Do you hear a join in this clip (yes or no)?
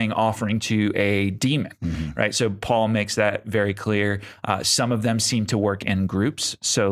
no